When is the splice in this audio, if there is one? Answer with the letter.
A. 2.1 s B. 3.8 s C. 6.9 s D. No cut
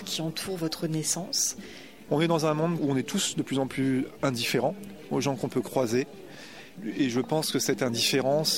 A